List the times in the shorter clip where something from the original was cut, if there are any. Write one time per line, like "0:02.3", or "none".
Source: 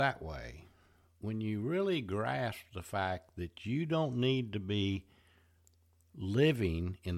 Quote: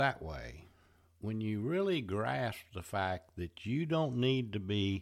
none